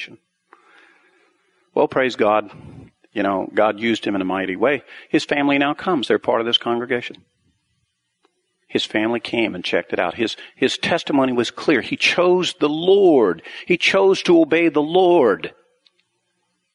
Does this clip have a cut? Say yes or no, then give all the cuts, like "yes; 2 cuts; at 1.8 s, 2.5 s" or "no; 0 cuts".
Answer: no; 0 cuts